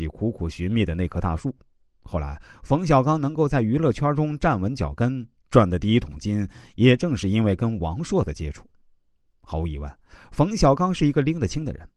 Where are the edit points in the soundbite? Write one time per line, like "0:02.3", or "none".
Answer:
none